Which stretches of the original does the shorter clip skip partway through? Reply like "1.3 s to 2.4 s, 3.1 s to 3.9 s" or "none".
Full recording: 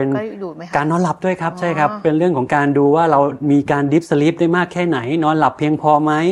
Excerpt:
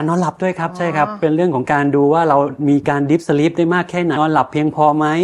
5.0 s to 5.2 s